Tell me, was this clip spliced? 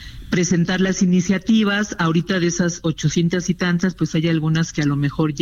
no; 0 cuts

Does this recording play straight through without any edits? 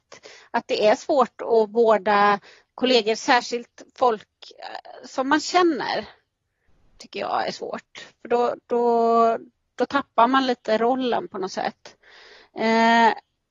yes; 0 cuts

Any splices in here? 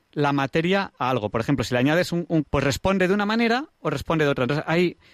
yes; 1 cut; at 2.4 s

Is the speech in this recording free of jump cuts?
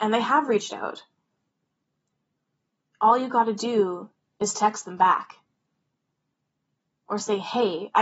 yes; 0 cuts

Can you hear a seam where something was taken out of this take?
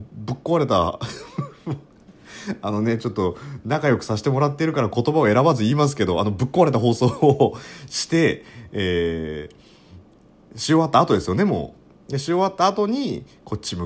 no; 0 cuts

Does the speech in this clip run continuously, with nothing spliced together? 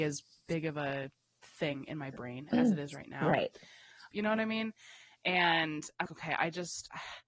no; 2 cuts; at 4.1 s, 6.1 s

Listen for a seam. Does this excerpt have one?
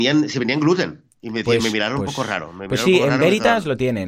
no; 0 cuts

